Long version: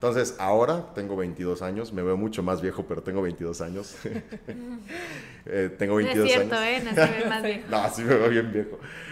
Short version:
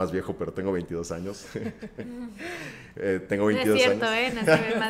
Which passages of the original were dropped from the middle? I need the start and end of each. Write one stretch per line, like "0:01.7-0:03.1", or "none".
none